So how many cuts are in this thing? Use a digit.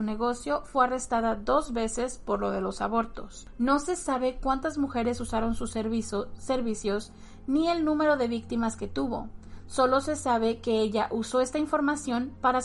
0